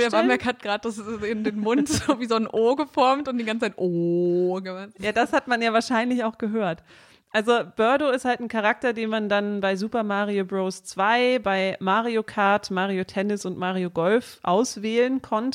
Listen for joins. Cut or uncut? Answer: uncut